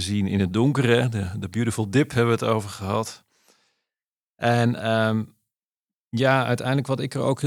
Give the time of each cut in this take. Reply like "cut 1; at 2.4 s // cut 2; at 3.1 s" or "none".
none